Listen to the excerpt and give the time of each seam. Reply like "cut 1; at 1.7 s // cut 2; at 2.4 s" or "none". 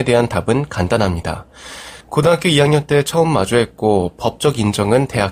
cut 1; at 2.0 s